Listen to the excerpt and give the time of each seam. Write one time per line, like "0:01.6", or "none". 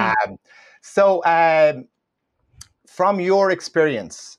none